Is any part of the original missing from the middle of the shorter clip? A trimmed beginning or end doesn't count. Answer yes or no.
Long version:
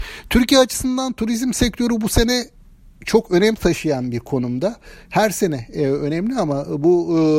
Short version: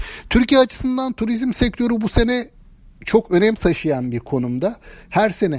no